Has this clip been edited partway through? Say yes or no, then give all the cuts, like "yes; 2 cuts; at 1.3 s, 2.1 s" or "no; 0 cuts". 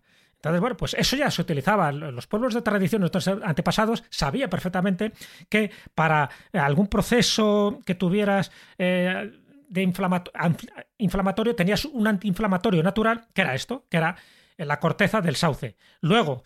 no; 0 cuts